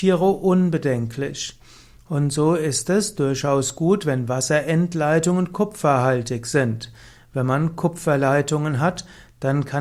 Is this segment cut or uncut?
uncut